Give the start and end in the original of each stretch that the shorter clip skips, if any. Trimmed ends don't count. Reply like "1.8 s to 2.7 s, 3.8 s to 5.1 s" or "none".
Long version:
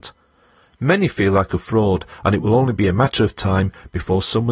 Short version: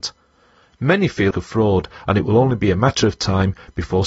1.3 s to 1.5 s